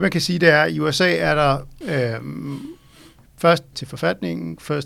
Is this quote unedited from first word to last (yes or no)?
no